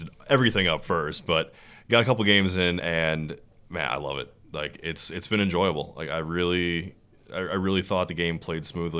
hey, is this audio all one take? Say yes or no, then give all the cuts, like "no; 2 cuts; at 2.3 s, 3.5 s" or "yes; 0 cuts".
yes; 0 cuts